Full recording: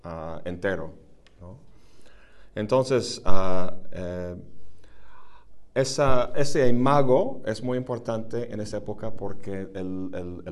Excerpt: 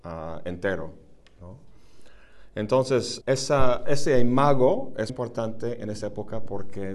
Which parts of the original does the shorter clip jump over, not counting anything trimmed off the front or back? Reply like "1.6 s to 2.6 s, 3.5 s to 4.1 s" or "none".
3.2 s to 5.7 s, 7.6 s to 7.8 s